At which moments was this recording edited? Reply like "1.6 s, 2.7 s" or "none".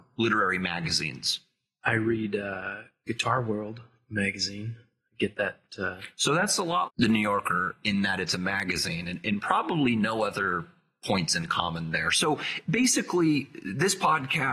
6.9 s